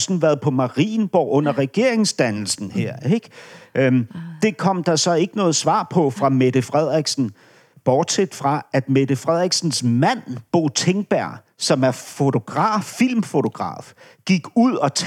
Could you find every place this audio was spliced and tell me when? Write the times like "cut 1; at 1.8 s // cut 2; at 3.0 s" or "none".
none